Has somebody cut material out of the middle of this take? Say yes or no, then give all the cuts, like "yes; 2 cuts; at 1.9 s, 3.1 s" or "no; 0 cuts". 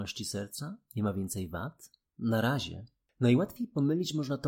no; 0 cuts